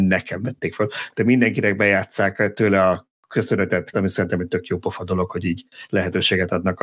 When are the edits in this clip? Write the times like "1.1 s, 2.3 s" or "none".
3.9 s